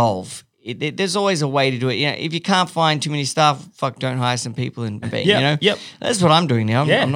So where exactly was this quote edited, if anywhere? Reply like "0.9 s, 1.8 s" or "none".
5.0 s